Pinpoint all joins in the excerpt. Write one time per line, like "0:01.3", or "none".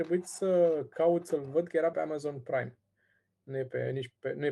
0:01.9